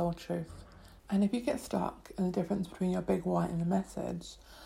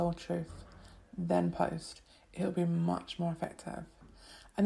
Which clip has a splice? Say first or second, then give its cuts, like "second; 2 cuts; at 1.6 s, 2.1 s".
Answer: first; 1 cut; at 1.0 s